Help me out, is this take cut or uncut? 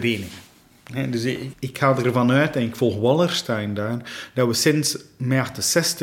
cut